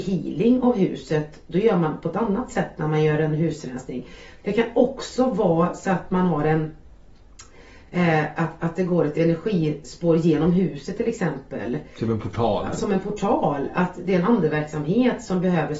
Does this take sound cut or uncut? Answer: cut